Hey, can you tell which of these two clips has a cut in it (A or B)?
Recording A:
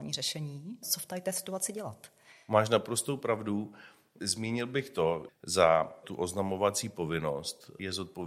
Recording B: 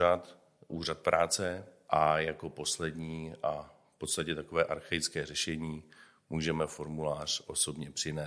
A